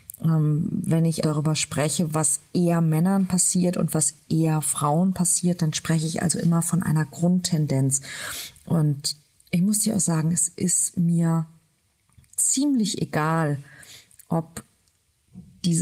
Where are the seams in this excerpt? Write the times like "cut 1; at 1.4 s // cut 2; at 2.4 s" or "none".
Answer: cut 1; at 1.2 s